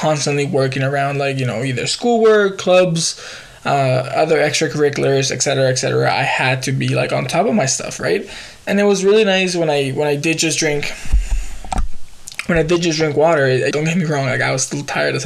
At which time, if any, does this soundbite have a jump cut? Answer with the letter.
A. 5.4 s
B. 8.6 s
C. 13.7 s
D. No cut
C